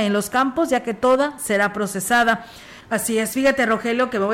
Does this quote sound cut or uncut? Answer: cut